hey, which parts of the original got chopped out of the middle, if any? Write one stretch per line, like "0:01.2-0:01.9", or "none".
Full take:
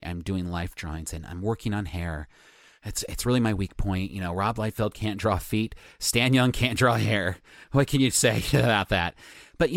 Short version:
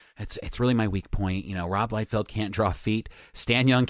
none

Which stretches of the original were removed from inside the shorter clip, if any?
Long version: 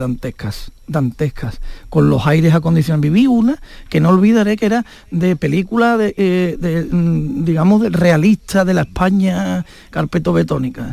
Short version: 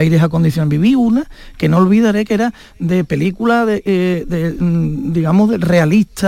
none

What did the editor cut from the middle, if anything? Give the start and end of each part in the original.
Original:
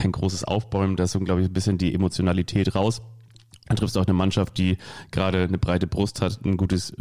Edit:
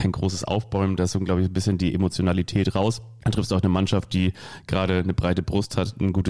0:03.2-0:03.7

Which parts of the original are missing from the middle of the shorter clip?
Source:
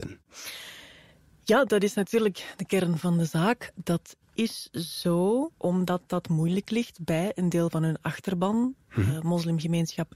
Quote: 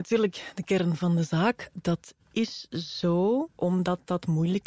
none

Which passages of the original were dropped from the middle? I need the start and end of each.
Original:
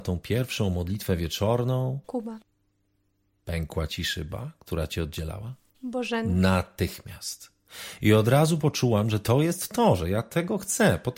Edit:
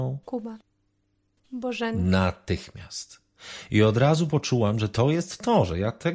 0:03.2-0:05.7

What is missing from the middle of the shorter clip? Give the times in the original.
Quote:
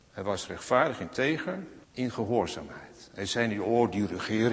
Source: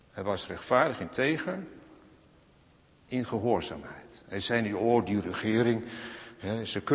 0:01.8-0:03.0

